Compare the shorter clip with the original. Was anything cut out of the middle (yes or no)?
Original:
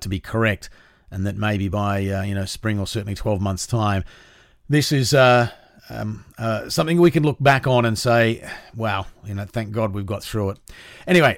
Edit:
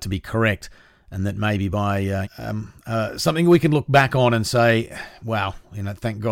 yes